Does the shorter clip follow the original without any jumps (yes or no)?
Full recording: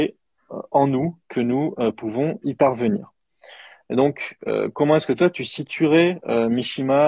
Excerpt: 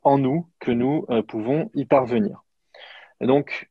yes